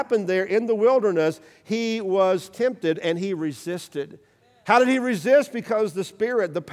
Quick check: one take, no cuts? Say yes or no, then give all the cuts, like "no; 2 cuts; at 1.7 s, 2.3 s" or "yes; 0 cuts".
yes; 0 cuts